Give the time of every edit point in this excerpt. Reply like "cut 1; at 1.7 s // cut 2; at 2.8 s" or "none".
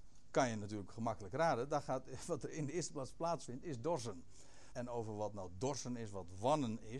cut 1; at 4.7 s

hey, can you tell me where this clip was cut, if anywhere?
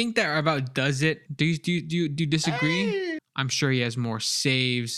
cut 1; at 1.3 s // cut 2; at 3.2 s

